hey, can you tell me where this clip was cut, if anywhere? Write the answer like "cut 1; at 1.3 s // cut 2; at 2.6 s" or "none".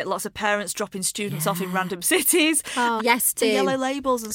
cut 1; at 3.0 s